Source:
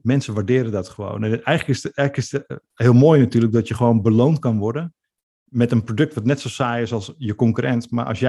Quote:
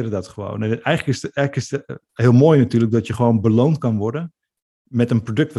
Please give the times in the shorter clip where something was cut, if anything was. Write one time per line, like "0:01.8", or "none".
none